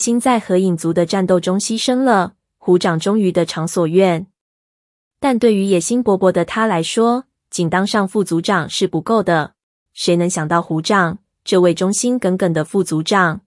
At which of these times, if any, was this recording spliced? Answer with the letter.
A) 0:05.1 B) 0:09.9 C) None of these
B